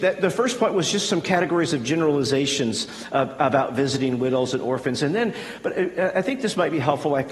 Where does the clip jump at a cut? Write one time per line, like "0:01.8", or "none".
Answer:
none